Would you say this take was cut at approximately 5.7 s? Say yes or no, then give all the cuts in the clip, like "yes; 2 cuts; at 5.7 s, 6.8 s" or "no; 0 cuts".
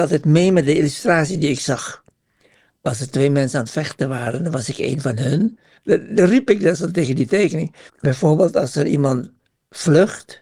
yes; 2 cuts; at 5.7 s, 7.9 s